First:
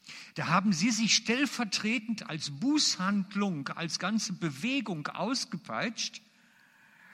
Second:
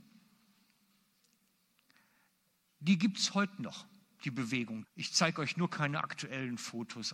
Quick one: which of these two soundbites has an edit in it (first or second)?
second